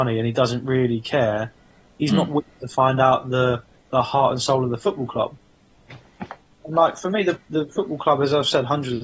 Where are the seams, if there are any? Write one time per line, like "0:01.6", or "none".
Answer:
none